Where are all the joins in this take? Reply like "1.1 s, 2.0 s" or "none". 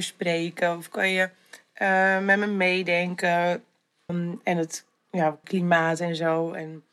4.1 s, 5.4 s